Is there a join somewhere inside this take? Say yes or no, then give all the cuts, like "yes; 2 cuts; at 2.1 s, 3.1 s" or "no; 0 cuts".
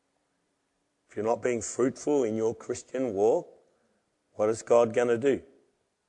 no; 0 cuts